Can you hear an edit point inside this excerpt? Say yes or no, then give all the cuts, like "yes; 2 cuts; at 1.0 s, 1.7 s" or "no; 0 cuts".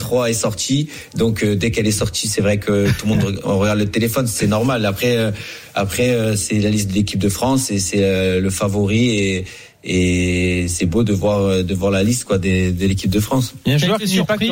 yes; 1 cut; at 10.7 s